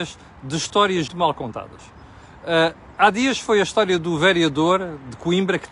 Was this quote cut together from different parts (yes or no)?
yes